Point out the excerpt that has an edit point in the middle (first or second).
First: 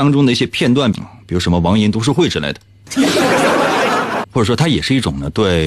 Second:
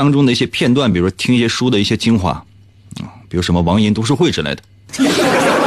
first